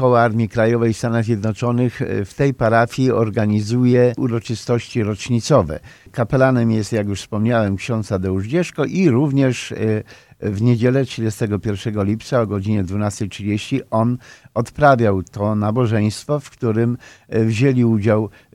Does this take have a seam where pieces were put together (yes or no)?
no